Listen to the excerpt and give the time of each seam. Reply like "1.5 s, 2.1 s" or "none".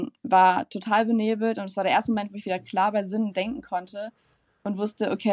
none